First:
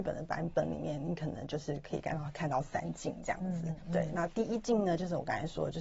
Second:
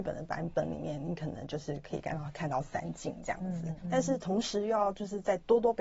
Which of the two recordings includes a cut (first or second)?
second